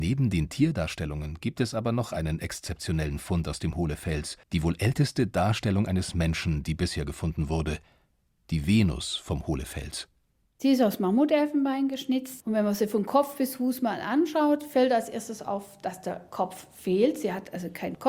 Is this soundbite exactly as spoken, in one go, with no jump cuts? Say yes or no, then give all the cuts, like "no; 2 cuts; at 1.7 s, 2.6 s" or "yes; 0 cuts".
no; 1 cut; at 4.4 s